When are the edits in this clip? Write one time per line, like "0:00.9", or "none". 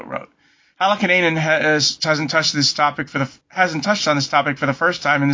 0:03.4